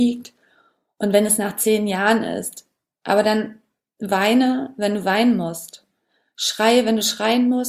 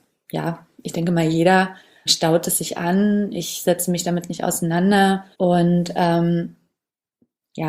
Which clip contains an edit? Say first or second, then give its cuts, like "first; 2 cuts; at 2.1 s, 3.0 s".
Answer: second; 2 cuts; at 2.1 s, 5.3 s